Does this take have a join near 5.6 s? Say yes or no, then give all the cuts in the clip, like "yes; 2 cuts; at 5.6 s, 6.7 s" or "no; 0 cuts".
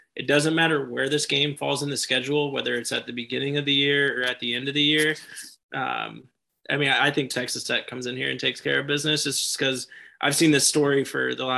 yes; 1 cut; at 5.6 s